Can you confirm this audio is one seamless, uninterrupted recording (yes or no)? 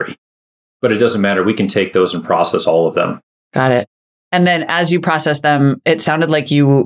yes